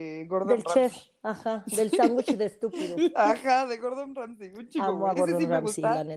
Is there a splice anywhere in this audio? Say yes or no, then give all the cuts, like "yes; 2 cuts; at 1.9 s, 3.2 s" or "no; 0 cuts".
no; 0 cuts